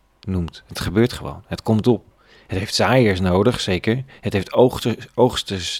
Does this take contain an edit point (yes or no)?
no